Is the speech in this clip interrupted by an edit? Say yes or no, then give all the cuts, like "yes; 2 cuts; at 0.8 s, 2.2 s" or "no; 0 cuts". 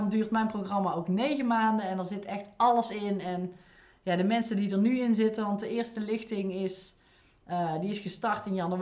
no; 0 cuts